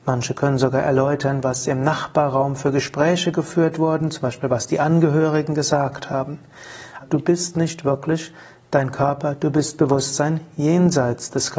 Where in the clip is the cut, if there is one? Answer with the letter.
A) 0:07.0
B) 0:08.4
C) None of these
A